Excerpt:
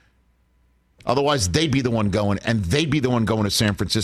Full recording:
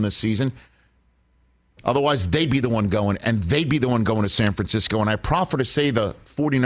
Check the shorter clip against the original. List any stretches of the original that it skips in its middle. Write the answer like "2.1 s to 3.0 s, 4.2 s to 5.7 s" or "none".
none